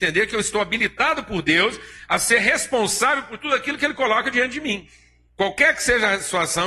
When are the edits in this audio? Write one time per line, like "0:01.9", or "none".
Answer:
0:05.3